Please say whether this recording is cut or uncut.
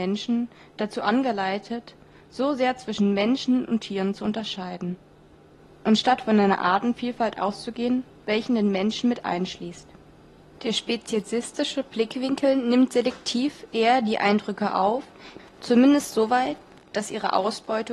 cut